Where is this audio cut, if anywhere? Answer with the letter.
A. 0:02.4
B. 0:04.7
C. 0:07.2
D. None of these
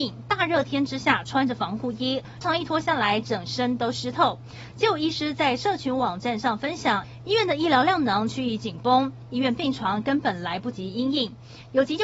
A